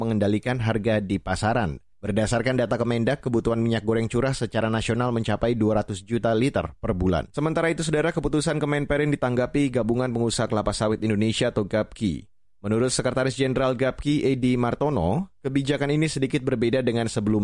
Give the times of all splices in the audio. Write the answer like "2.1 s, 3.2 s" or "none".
1.9 s